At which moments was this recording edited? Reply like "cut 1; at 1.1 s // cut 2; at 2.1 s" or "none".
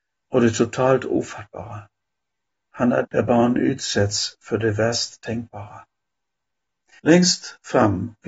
cut 1; at 3.0 s // cut 2; at 7.0 s